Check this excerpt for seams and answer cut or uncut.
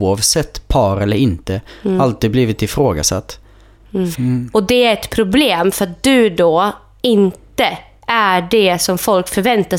cut